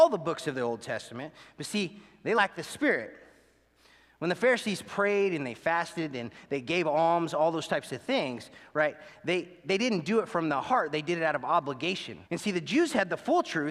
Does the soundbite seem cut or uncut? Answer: cut